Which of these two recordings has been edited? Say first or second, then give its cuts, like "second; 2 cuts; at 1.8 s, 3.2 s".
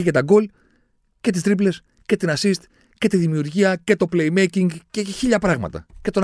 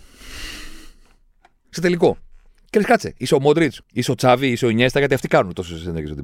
second; 2 cuts; at 1.6 s, 3.8 s